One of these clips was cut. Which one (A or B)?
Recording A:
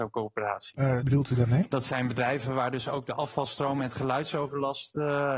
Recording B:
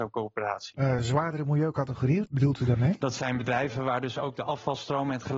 A